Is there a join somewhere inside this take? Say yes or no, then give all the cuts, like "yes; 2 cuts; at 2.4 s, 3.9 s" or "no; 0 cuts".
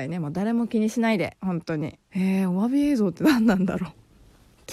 yes; 1 cut; at 2.0 s